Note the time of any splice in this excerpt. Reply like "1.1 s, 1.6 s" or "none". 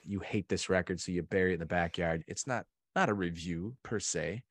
2.2 s